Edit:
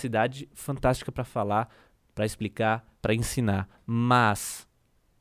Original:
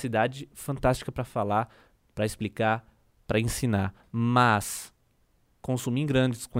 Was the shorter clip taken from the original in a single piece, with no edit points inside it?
no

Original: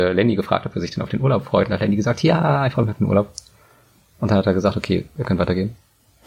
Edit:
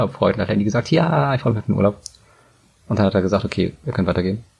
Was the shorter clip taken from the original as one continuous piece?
yes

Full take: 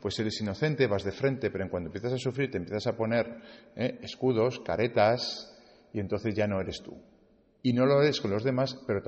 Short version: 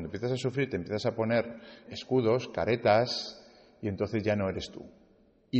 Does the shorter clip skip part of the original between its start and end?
yes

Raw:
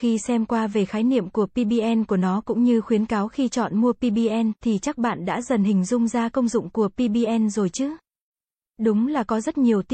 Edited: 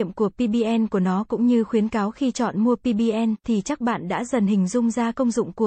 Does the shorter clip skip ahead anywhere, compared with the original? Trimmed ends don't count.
no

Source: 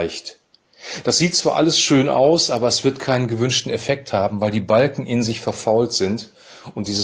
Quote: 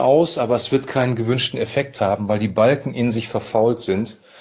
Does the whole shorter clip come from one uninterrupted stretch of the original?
yes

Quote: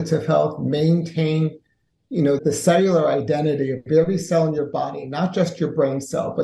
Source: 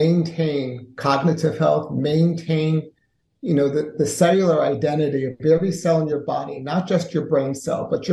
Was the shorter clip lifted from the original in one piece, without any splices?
no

